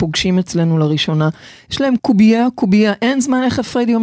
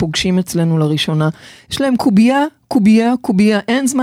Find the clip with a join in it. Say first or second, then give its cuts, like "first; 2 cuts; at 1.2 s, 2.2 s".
first; 1 cut; at 2.0 s